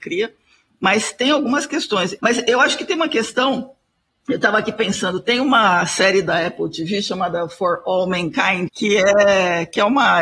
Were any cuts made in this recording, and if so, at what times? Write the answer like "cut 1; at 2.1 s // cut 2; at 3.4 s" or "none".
cut 1; at 2.2 s // cut 2; at 8.7 s